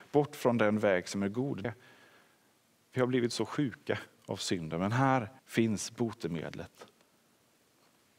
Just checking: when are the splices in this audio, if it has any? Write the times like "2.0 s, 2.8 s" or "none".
1.6 s, 5.4 s